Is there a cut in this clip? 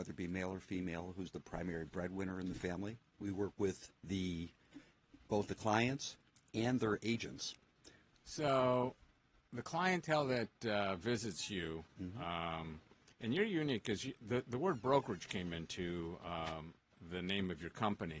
yes; 3 cuts; at 3.1 s, 5.2 s, 8.1 s

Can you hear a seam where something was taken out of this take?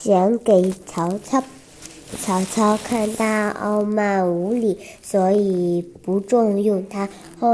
no; 0 cuts

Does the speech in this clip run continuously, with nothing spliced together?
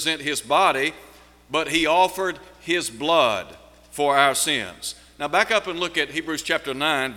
yes; 0 cuts

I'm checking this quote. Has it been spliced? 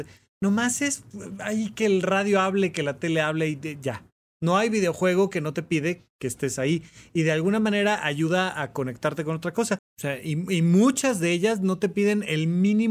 yes; 2 cuts; at 4.2 s, 9.8 s

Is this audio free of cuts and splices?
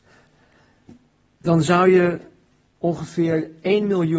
yes; 0 cuts

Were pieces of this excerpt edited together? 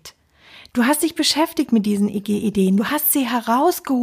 no; 0 cuts

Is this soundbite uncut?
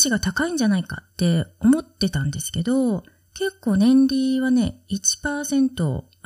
no; 1 cut; at 1.1 s

